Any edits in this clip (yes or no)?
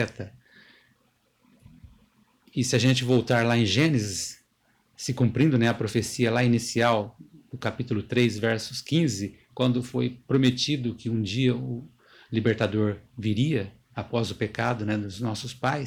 no